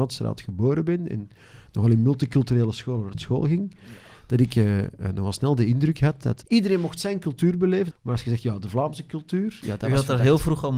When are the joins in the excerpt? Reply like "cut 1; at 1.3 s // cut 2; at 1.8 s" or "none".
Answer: cut 1; at 6.4 s // cut 2; at 7.9 s

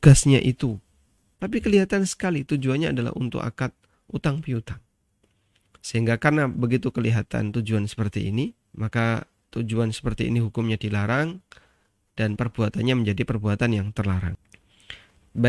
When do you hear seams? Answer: cut 1; at 1.3 s // cut 2; at 8.6 s

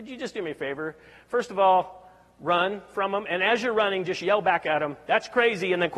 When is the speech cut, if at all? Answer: none

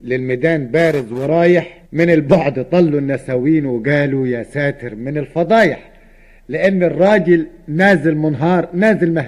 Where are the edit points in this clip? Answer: cut 1; at 1.8 s

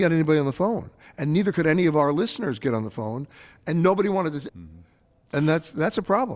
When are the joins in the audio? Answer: cut 1; at 4.5 s

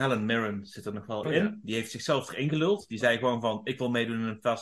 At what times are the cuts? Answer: cut 1; at 1.2 s

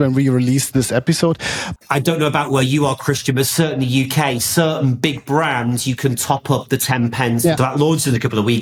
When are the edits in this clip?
cut 1; at 1.8 s // cut 2; at 7.6 s

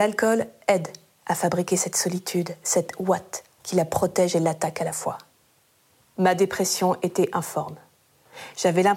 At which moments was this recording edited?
cut 1; at 6.0 s

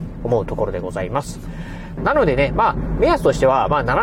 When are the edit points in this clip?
cut 1; at 2.0 s

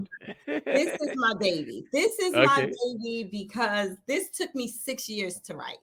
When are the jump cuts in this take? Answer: none

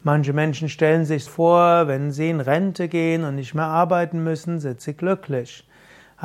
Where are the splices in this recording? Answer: cut 1; at 1.3 s

